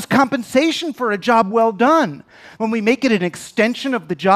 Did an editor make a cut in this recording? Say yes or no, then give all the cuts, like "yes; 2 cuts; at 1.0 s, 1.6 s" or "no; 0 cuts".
yes; 1 cut; at 2.6 s